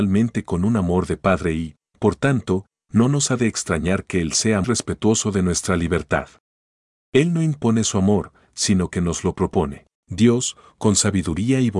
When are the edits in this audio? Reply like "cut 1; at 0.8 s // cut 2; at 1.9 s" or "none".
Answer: cut 1; at 4.6 s // cut 2; at 9.9 s